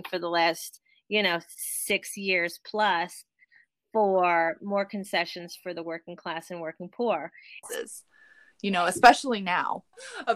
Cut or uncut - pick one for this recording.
cut